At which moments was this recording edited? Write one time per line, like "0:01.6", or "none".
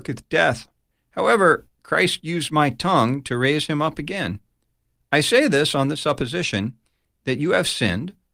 0:00.9